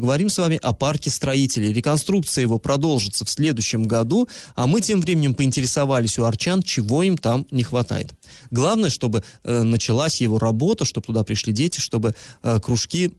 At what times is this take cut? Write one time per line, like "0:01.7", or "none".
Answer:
0:08.5